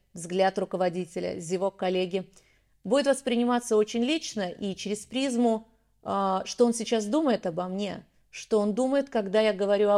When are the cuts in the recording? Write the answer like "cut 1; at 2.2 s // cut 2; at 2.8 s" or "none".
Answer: none